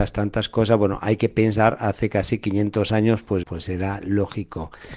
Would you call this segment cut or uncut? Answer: cut